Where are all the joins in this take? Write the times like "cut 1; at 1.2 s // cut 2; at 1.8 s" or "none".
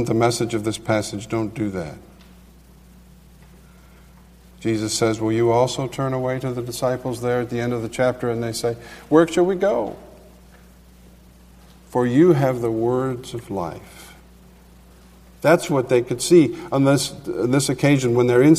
none

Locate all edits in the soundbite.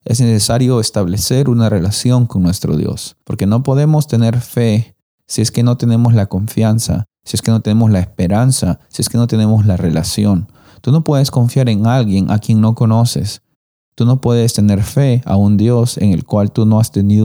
cut 1; at 3.2 s

